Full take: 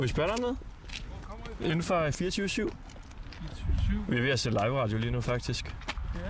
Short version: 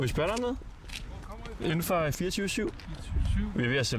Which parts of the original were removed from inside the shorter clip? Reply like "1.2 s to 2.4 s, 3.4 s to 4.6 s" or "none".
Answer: 2.7 s to 3.2 s